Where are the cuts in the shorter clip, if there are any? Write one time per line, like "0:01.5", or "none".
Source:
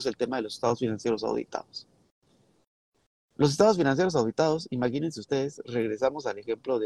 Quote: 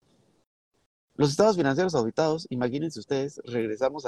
none